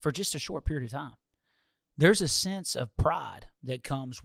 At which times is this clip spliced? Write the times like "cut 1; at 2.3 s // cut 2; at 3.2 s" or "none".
none